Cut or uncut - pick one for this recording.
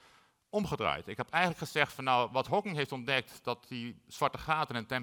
uncut